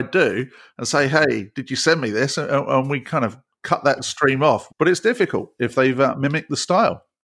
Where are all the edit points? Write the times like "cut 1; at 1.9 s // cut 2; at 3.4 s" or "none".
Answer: cut 1; at 4.7 s